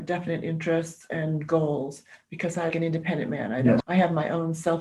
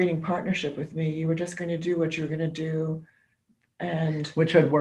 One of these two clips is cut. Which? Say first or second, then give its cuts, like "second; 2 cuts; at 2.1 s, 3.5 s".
first; 2 cuts; at 2.7 s, 3.8 s